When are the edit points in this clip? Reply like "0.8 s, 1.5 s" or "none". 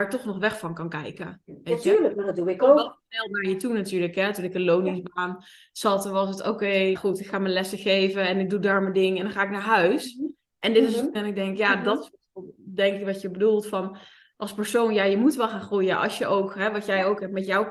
6.9 s, 11.1 s